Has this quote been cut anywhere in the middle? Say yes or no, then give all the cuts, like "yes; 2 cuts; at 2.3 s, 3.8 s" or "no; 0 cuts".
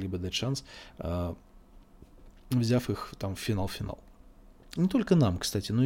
yes; 1 cut; at 4.8 s